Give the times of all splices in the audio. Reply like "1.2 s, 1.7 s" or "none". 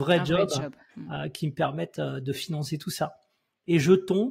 none